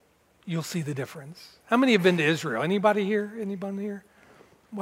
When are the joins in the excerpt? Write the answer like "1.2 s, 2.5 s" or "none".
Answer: none